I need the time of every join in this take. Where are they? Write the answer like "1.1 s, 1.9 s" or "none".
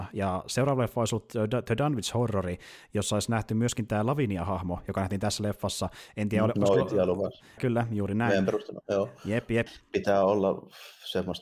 7.6 s, 9.7 s